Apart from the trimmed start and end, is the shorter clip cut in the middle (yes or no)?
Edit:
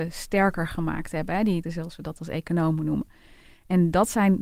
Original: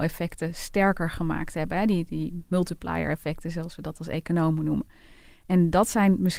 yes